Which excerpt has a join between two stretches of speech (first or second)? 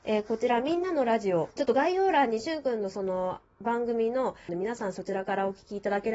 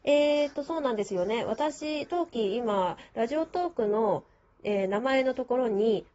first